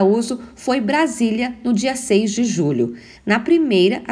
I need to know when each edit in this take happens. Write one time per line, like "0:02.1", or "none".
0:03.1